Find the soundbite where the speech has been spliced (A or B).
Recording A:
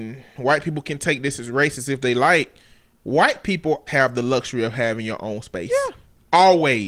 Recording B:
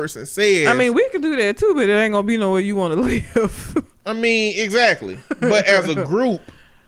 A